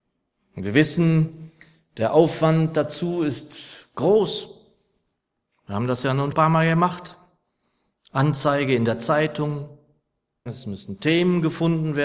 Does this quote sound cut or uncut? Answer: cut